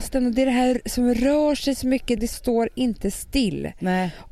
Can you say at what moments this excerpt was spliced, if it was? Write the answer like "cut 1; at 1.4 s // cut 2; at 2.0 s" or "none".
cut 1; at 2.2 s